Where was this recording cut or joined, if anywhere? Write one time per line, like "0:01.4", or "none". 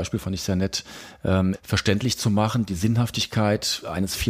0:01.5